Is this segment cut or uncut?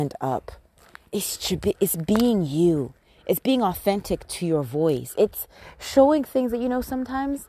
uncut